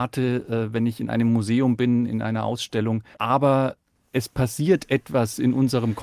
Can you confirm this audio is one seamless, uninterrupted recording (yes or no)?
no